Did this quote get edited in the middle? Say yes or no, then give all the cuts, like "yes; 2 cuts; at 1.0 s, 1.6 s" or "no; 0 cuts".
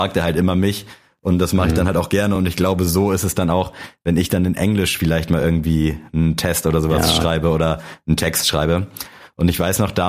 no; 0 cuts